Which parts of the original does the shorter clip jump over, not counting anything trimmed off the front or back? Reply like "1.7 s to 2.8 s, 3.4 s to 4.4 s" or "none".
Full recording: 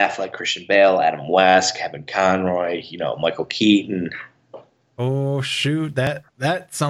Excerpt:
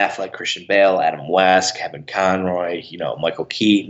none

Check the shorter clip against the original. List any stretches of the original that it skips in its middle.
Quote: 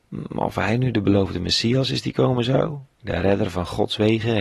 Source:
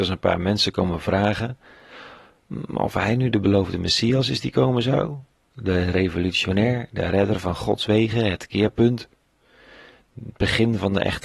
5.4 s to 6.9 s

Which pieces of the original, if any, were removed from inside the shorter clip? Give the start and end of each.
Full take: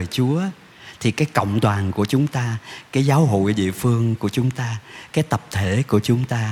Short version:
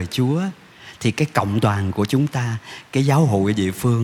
none

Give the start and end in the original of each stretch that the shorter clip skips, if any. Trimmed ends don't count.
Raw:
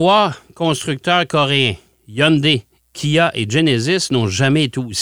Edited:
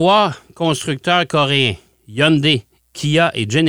none

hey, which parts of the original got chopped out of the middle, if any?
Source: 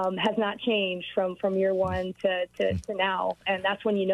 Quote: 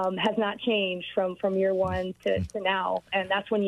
2.2 s to 2.5 s

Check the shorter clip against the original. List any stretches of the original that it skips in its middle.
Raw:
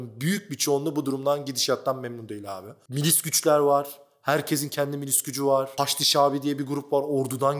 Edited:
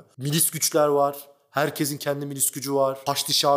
none

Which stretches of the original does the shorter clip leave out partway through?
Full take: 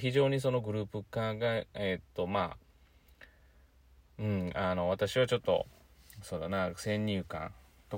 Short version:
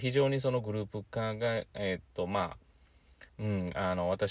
3.3 s to 4.1 s

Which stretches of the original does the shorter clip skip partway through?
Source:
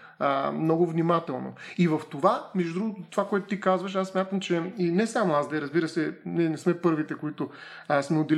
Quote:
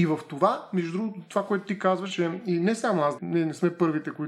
3.9 s to 4.4 s, 5.5 s to 6.2 s

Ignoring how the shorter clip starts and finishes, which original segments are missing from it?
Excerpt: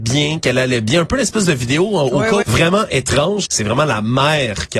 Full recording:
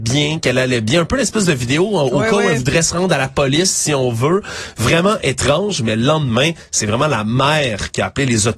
2.4 s to 4.7 s, 5.8 s to 6.7 s

